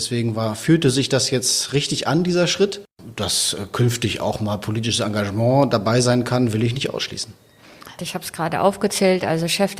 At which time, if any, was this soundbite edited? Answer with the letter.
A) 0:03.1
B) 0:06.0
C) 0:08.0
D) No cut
C